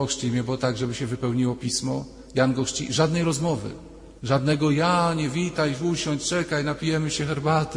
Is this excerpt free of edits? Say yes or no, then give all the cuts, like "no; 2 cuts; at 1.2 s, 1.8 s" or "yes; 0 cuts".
no; 1 cut; at 4.2 s